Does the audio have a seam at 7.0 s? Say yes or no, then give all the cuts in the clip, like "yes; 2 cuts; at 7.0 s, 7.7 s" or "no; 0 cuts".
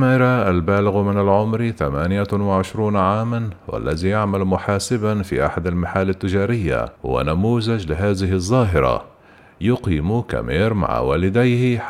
yes; 1 cut; at 7.0 s